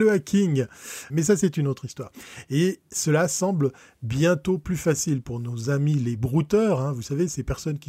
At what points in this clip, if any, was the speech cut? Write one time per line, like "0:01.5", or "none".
0:01.1